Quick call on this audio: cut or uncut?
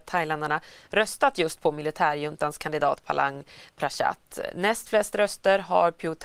uncut